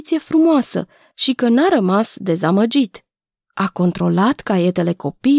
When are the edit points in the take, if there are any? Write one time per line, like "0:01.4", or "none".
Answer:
none